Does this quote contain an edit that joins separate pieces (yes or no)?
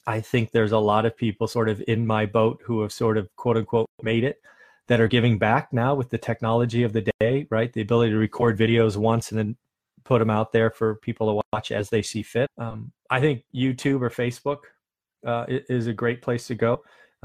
yes